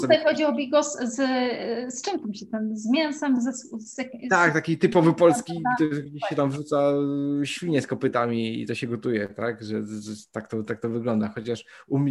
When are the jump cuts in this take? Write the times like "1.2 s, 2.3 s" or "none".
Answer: none